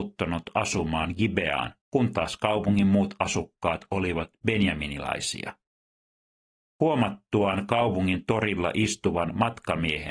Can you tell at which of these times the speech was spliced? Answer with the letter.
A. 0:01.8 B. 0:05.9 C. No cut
A